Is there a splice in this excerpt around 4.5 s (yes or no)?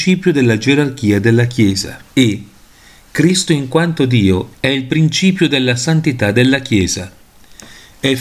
yes